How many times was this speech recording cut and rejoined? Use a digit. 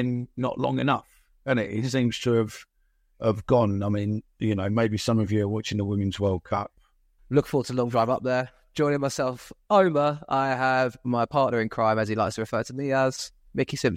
1